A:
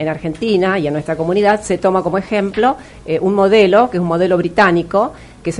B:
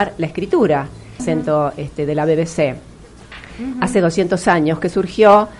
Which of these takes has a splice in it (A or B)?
B